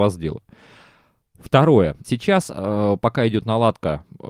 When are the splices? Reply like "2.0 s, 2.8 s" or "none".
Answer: 2.0 s